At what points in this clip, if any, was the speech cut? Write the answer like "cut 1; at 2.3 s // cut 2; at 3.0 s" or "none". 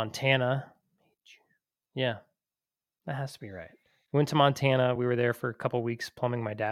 none